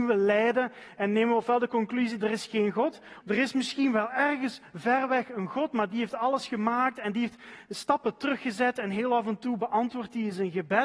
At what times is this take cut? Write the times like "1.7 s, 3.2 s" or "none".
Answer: 3.2 s